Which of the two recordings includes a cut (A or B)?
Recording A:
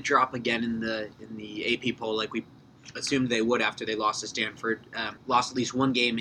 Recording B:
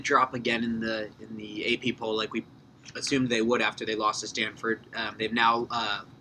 A